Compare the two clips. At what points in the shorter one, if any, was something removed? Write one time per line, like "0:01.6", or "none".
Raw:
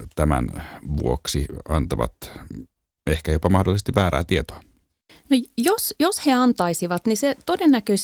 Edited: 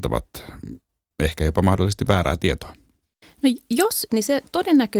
0:04.1